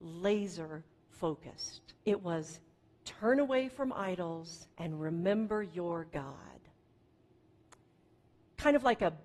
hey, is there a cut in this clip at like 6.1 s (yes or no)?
no